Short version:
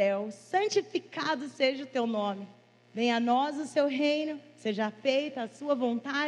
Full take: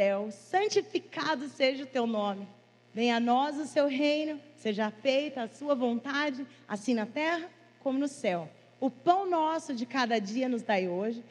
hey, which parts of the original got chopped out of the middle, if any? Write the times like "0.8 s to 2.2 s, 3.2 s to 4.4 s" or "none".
none